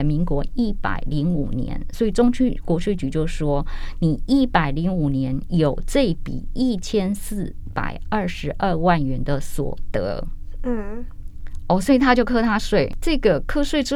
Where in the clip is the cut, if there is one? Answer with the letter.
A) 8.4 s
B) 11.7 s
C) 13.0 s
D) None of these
D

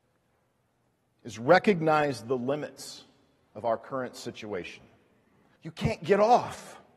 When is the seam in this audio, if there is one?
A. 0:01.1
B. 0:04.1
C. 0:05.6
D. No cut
C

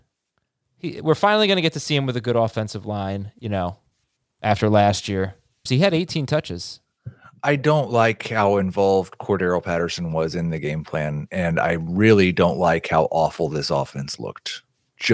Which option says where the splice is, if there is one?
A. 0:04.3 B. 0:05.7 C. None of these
B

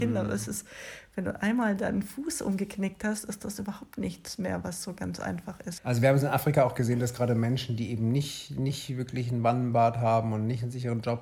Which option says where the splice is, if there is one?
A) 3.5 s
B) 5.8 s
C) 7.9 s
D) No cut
B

